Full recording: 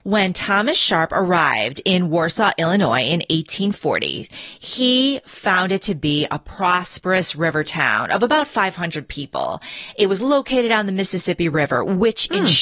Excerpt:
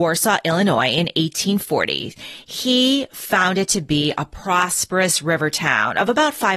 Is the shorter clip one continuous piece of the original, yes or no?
yes